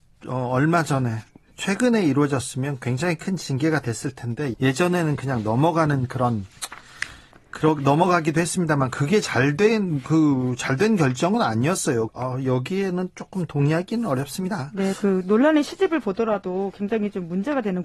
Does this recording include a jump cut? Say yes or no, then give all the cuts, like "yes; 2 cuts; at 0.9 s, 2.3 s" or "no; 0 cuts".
yes; 2 cuts; at 4.5 s, 12.1 s